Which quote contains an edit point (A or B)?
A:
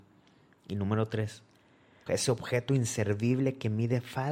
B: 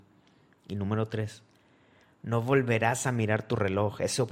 A